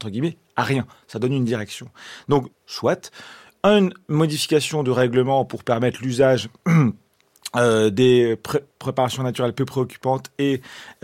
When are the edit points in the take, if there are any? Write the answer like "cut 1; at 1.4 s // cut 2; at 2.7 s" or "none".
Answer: cut 1; at 2.5 s